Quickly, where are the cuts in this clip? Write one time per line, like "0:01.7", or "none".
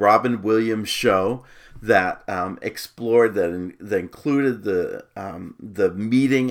none

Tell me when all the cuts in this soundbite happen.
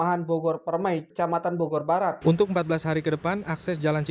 0:01.1
0:02.2

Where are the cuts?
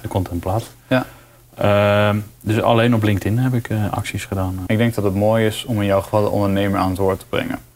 0:04.7

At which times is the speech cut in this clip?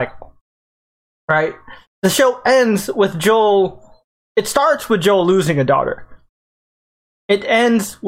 0:01.9

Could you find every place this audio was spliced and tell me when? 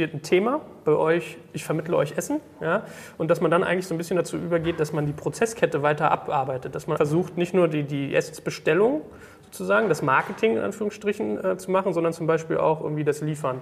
0:07.0

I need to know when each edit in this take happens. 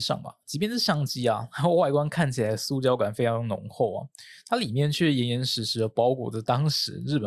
none

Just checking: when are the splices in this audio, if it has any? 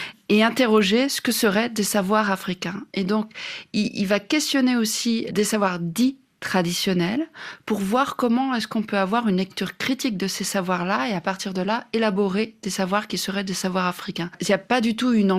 0:05.3

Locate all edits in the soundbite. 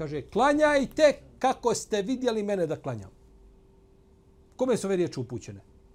none

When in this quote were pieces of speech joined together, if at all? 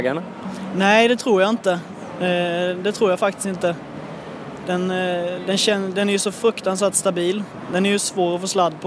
none

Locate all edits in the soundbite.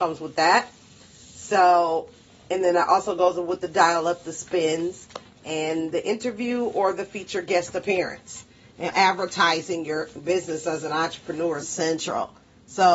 0:08.9
0:11.6

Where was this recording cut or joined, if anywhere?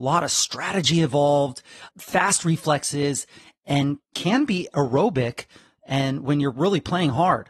0:01.9

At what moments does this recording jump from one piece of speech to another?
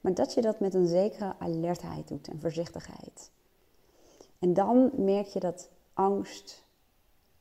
none

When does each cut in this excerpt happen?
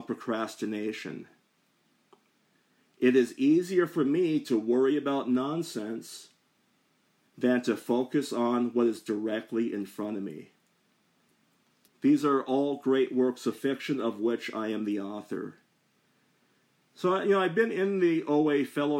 0:11.9

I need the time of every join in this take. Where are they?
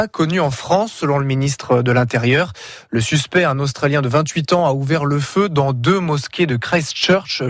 none

